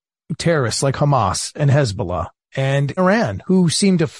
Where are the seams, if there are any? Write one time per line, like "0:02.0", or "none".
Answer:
0:03.0